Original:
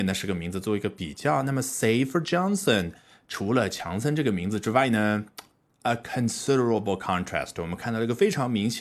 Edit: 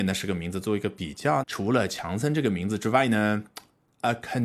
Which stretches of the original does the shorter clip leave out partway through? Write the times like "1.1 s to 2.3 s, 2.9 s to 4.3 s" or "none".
1.4 s to 3.2 s